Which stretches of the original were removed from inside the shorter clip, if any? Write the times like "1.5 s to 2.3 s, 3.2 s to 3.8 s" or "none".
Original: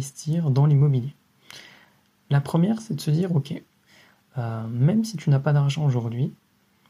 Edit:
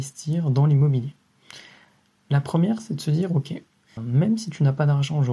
4.0 s to 4.6 s